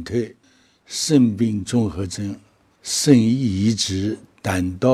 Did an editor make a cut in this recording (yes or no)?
no